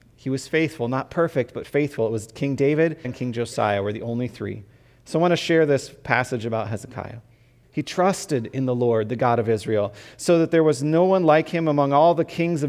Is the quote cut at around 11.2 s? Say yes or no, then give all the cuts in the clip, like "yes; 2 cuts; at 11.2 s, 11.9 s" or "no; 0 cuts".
no; 2 cuts; at 3.0 s, 7.6 s